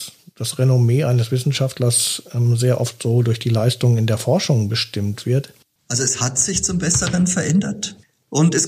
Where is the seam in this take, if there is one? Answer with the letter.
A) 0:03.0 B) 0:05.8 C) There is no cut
B